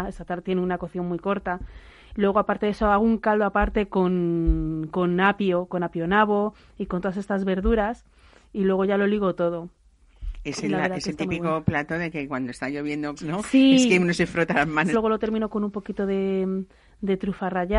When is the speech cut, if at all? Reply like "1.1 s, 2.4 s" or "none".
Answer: 13.2 s, 14.9 s